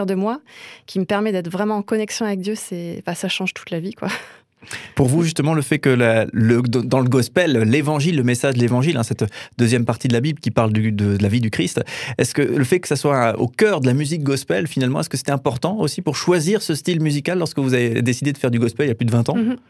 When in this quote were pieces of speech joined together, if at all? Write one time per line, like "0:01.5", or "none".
none